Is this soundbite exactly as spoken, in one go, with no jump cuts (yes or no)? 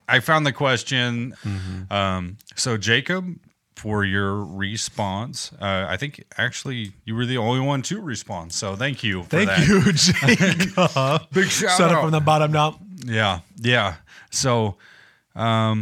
no